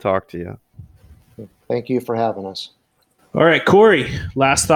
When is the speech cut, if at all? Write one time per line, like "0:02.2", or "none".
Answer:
0:03.2